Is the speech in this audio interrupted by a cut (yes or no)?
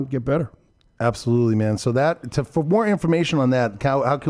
no